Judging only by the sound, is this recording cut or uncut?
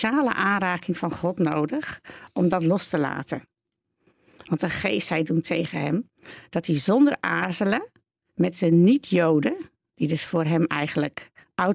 uncut